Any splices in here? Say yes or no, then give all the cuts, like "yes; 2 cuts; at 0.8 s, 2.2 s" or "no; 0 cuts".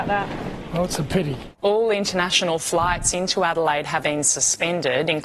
yes; 2 cuts; at 1.6 s, 4.0 s